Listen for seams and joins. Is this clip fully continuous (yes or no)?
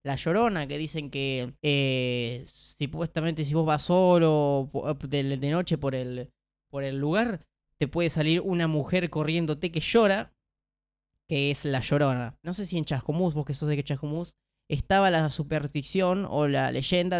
no